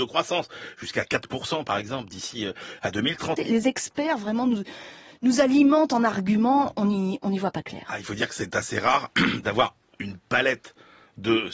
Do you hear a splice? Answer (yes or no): yes